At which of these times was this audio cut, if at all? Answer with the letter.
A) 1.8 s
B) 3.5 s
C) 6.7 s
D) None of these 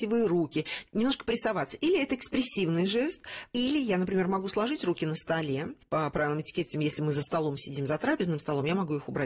C